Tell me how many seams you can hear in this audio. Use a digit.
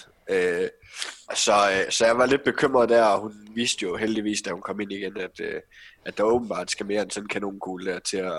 1